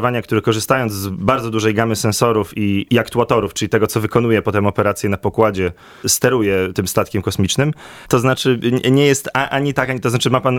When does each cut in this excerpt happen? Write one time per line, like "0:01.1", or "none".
0:02.9
0:08.0